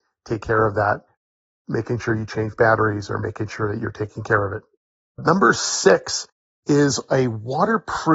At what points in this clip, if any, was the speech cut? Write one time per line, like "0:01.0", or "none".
none

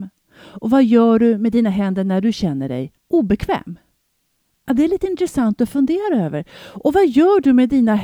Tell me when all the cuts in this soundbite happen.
0:03.0

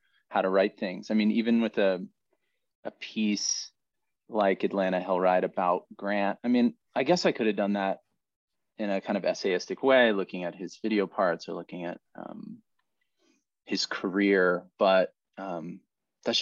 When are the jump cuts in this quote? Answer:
none

